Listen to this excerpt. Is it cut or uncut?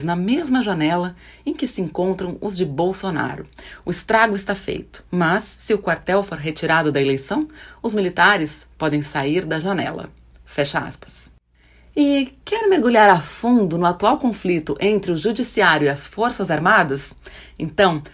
uncut